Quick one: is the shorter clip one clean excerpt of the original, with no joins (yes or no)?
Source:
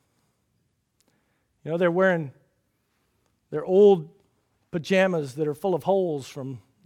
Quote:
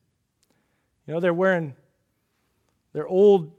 yes